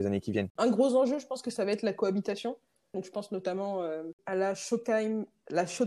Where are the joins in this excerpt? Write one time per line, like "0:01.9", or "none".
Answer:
0:02.9

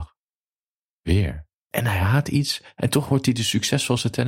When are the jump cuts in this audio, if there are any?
0:01.5

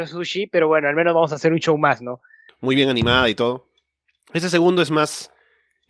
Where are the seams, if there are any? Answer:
0:02.5

